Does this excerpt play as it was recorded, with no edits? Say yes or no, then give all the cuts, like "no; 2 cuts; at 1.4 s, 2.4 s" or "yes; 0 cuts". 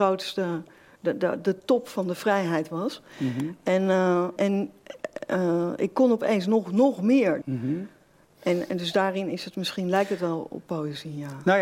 no; 2 cuts; at 4.4 s, 7.4 s